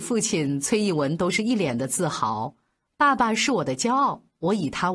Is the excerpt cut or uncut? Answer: uncut